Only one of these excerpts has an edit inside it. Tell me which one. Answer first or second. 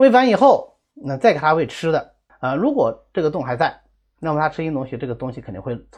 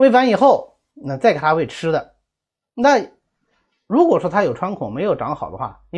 first